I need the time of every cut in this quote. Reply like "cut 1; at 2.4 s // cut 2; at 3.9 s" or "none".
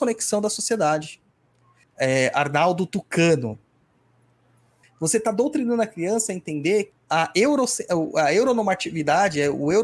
cut 1; at 1.8 s // cut 2; at 4.8 s // cut 3; at 6.9 s